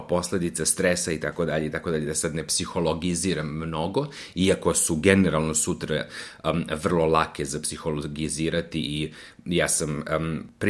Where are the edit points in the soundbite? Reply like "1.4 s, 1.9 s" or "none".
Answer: none